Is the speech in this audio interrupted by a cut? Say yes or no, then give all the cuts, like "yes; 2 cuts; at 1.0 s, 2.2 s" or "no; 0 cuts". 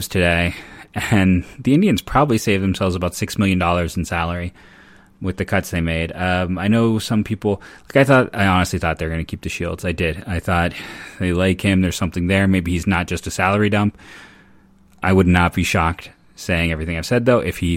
no; 0 cuts